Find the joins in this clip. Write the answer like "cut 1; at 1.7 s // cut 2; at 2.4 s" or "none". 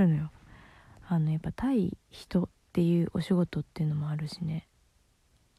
cut 1; at 2.0 s

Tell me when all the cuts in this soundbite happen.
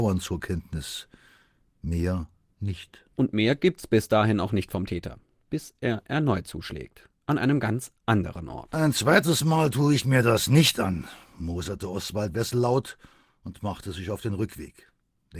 none

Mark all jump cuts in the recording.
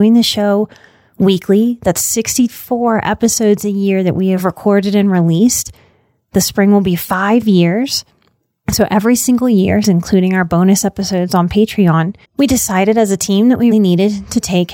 cut 1; at 9.8 s // cut 2; at 12.2 s // cut 3; at 13.7 s

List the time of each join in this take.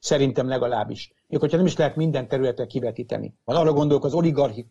cut 1; at 3.5 s

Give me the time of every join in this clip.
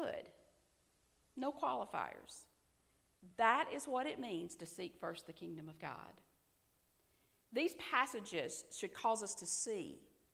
none

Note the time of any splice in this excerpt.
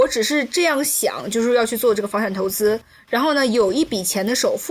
none

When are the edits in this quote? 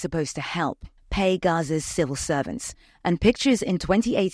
cut 1; at 1.0 s

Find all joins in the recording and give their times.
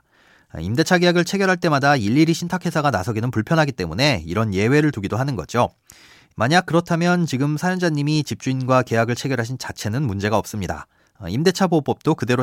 none

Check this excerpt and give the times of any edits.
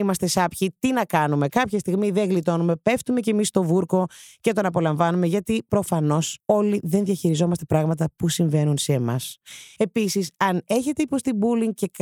cut 1; at 6.4 s // cut 2; at 9.8 s

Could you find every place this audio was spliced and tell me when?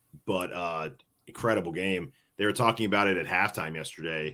none

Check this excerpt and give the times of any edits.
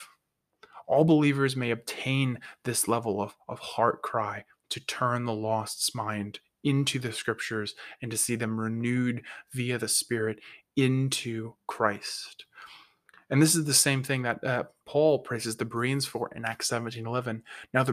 none

